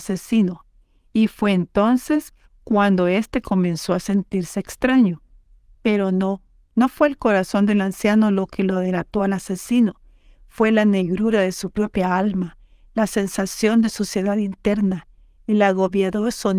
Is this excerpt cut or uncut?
cut